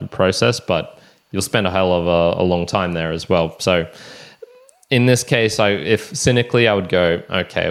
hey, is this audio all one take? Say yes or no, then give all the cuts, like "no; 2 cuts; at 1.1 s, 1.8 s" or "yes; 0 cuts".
yes; 0 cuts